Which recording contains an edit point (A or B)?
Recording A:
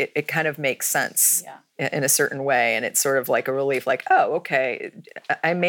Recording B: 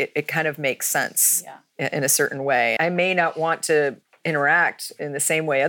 B